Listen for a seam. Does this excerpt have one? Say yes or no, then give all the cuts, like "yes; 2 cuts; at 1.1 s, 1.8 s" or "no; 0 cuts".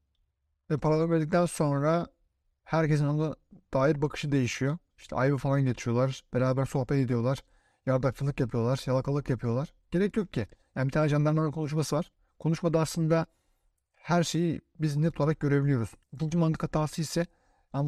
yes; 2 cuts; at 4.9 s, 16.0 s